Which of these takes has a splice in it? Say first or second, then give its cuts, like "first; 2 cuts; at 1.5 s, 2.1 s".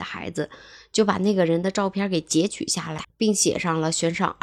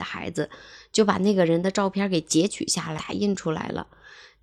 first; 1 cut; at 3.0 s